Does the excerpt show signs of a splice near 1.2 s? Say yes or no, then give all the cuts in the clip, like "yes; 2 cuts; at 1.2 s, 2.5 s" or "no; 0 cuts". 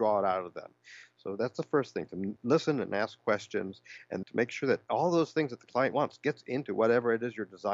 no; 2 cuts; at 4.2 s, 5.9 s